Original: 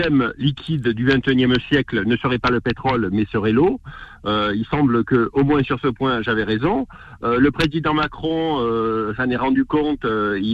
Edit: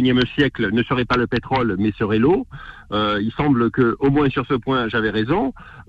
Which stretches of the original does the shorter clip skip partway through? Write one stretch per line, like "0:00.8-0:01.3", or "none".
none